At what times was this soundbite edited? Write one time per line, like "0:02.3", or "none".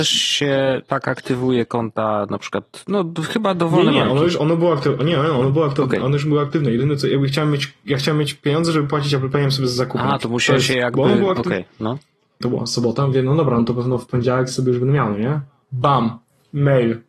0:04.4
0:12.4